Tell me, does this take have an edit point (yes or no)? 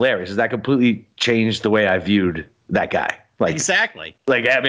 no